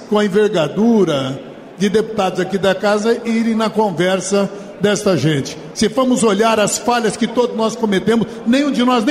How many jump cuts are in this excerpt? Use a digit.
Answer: 1